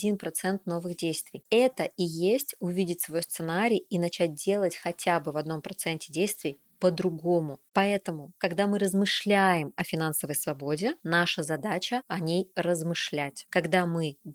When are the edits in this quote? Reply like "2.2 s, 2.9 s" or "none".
none